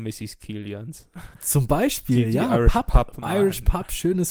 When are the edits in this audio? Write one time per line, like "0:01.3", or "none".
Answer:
0:01.3
0:03.2